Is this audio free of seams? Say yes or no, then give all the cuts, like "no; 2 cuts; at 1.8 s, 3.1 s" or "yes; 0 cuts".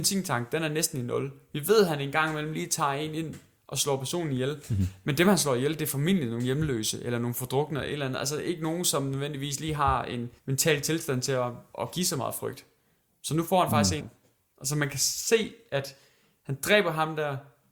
no; 2 cuts; at 10.4 s, 14.0 s